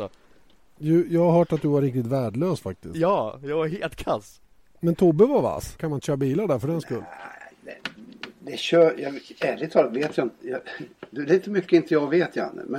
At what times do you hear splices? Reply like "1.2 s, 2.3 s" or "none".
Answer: 5.8 s